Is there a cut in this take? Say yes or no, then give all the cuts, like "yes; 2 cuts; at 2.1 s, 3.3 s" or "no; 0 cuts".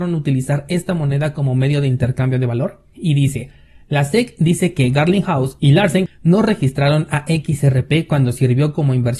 yes; 1 cut; at 2.9 s